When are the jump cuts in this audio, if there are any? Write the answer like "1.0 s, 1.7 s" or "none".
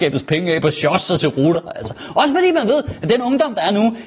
none